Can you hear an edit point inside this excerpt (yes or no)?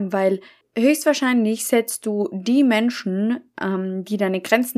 no